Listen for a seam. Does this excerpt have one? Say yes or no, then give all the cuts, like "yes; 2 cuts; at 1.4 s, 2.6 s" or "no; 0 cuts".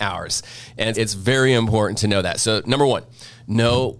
yes; 1 cut; at 0.9 s